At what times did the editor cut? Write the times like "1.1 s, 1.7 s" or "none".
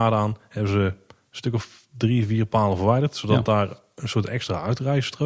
none